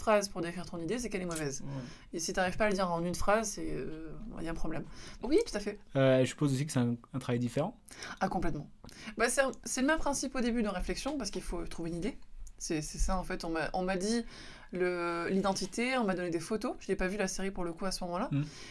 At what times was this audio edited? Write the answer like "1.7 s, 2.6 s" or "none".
5.2 s